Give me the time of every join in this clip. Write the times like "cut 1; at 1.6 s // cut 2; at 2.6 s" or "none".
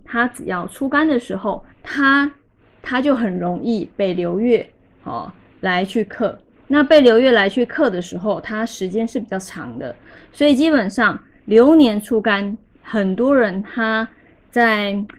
cut 1; at 1.7 s